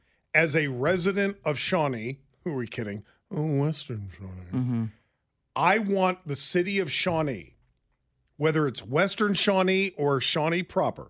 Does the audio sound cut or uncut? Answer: uncut